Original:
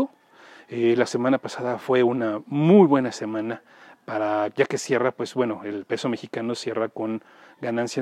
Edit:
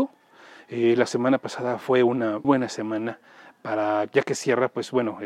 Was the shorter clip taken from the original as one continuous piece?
no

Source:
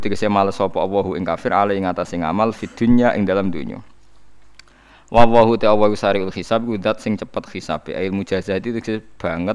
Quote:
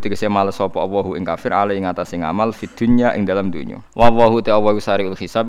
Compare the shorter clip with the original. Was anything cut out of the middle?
yes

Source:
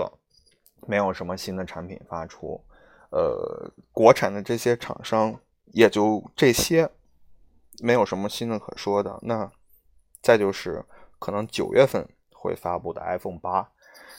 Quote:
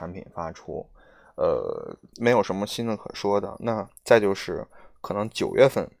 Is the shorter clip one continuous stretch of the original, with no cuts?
no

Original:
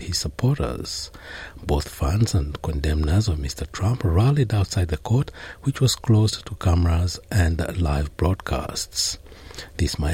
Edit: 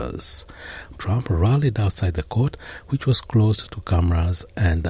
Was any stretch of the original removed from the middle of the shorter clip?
yes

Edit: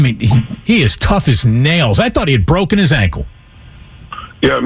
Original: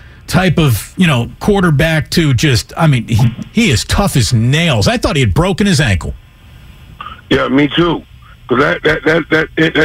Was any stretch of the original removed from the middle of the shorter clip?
no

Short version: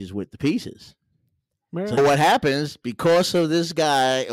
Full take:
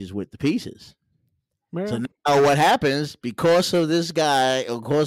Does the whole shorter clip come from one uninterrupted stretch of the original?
no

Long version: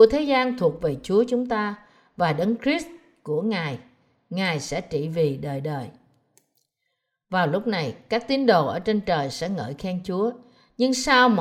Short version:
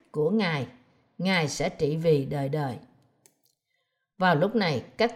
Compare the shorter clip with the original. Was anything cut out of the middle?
no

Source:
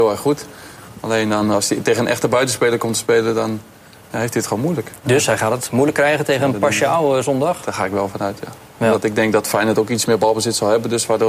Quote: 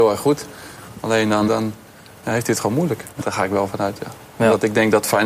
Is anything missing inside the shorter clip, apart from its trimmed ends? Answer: yes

